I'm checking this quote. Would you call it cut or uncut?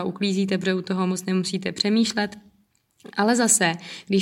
uncut